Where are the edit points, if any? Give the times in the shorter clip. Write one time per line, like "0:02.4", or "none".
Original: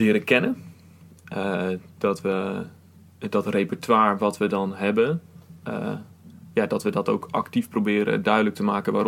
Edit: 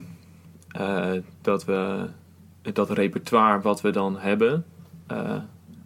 none